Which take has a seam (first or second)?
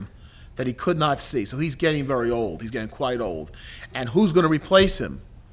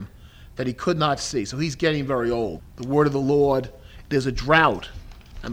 second